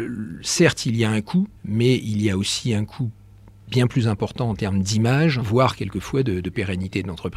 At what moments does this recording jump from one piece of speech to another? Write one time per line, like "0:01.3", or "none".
0:01.6
0:05.4